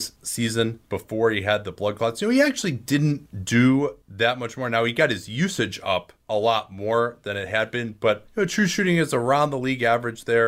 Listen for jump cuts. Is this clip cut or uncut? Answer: uncut